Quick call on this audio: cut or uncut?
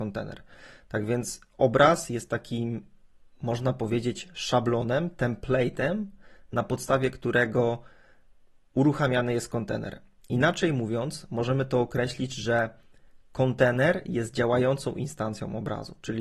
uncut